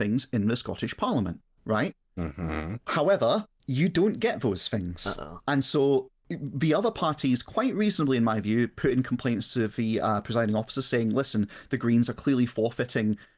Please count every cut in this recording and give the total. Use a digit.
1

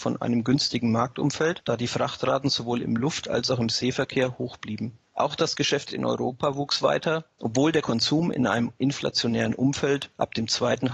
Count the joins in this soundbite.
1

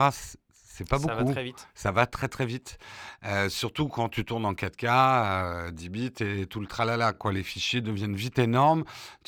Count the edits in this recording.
0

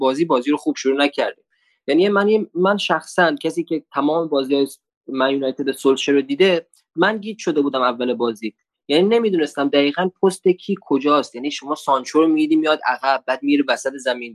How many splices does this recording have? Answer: 0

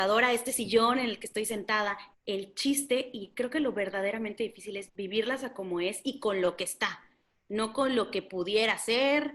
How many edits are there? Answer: 2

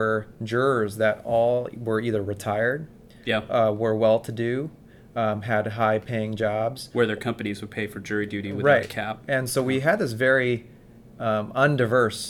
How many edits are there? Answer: 0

